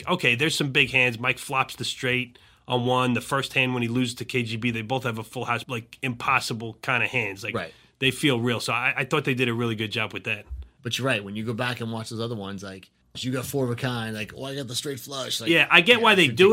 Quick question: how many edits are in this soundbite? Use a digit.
2